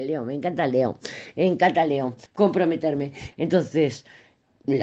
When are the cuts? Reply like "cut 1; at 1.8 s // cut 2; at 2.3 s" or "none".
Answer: cut 1; at 2.3 s // cut 2; at 3.3 s